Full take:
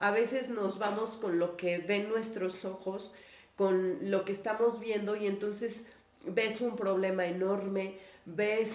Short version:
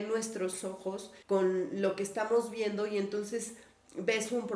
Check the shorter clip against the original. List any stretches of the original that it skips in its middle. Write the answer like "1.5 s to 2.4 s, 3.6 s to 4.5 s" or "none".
3.2 s to 3.5 s